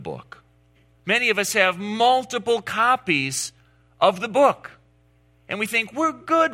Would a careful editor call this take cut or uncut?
cut